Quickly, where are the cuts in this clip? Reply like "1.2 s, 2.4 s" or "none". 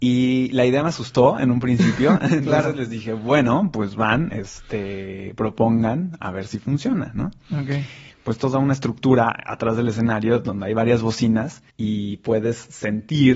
8.1 s, 11.7 s